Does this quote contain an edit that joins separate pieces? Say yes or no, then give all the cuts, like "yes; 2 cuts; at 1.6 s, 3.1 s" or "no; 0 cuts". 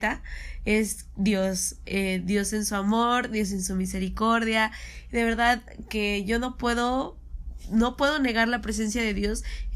no; 0 cuts